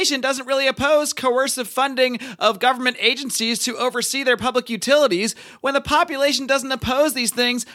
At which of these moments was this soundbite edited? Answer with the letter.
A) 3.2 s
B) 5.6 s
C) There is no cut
C